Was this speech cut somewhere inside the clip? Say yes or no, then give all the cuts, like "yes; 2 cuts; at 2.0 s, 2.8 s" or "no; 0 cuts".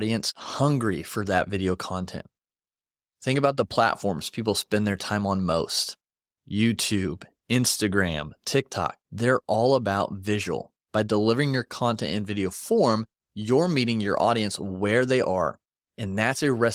yes; 1 cut; at 9.0 s